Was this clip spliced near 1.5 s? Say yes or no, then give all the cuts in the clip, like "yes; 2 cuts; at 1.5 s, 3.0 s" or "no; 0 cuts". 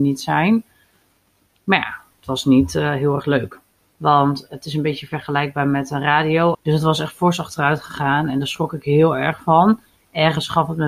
no; 2 cuts; at 3.8 s, 6.5 s